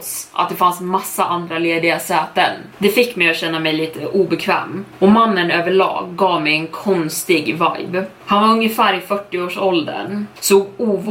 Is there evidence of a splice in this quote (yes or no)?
no